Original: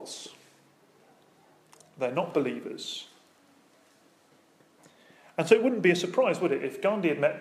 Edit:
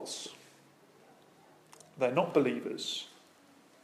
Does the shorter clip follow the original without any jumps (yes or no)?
yes